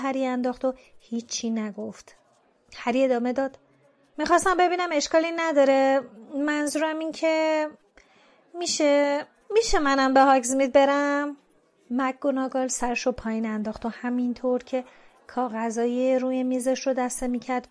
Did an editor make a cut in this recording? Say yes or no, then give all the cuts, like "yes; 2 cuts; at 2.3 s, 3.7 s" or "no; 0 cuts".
no; 0 cuts